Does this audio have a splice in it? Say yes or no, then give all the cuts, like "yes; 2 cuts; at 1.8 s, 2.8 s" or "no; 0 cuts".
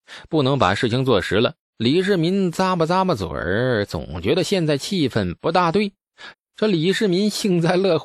yes; 2 cuts; at 1.6 s, 6.3 s